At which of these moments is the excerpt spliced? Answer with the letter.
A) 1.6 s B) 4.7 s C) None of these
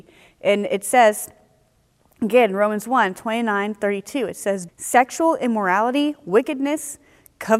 B